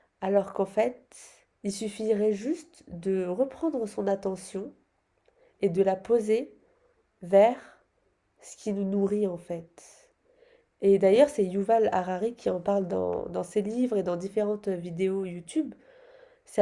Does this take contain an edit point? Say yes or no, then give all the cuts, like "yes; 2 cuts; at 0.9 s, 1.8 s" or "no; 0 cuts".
yes; 1 cut; at 1.5 s